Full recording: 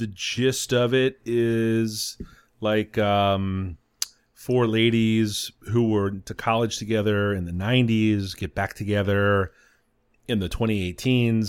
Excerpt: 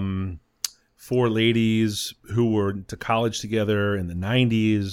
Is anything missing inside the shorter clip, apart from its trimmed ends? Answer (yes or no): no